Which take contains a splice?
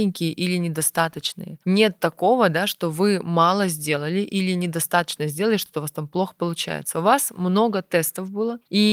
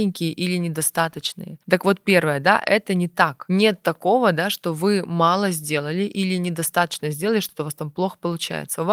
first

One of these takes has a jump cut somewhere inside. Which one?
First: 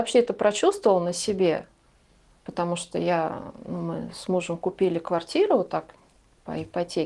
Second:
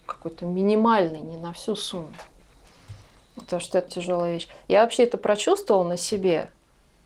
second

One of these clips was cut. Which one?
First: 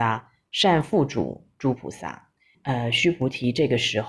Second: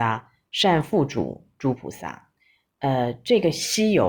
first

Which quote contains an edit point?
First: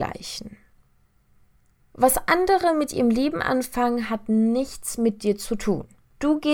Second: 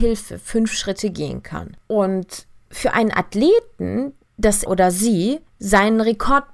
second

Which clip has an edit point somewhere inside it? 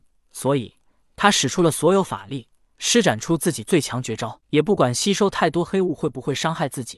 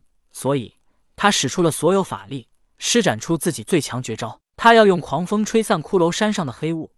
first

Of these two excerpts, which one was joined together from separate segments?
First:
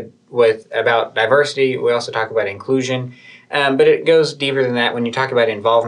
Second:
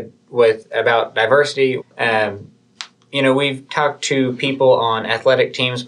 second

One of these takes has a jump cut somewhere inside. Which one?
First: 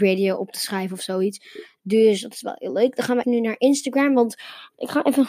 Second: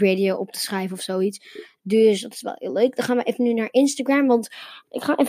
first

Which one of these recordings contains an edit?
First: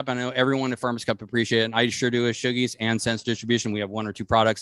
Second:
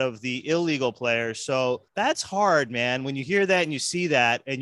second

